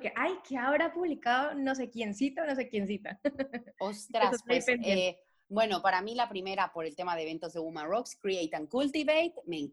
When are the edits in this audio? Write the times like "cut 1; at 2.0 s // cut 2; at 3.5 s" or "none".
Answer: none